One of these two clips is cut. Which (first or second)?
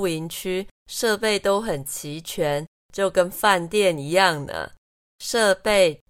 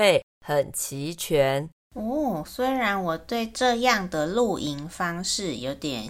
second